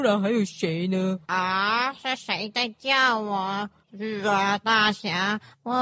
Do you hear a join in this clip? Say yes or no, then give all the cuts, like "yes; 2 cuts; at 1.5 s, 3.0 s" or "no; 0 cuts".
yes; 2 cuts; at 1.2 s, 3.8 s